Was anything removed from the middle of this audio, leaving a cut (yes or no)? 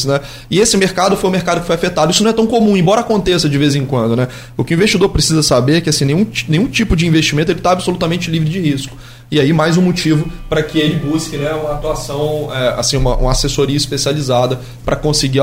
no